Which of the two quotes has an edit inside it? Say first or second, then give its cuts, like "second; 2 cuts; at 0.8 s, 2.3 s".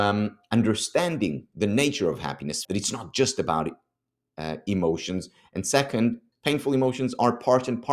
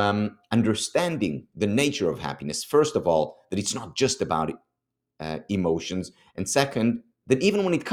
first; 2 cuts; at 2.6 s, 6.3 s